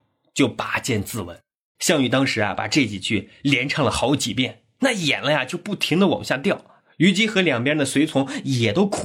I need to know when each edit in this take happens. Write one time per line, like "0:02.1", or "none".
0:01.8